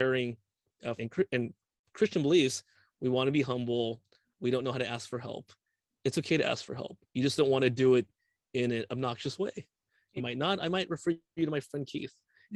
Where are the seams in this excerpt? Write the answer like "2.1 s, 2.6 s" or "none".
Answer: 1.0 s, 10.2 s